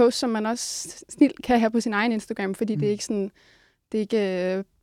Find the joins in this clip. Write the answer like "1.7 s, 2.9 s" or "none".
none